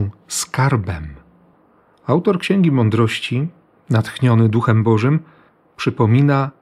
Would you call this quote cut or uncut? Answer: uncut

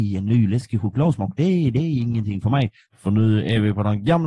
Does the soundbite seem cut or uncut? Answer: cut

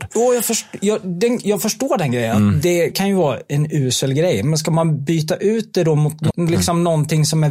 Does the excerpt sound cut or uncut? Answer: cut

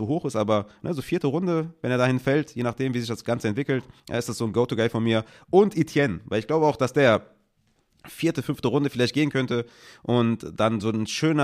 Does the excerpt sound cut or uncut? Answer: cut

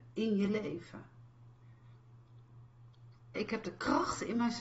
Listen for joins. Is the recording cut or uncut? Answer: cut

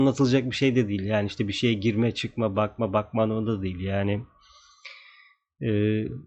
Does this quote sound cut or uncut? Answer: uncut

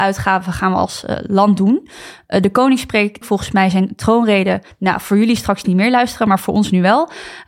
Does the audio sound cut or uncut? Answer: cut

